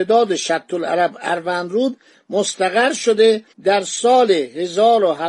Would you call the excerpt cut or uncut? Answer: cut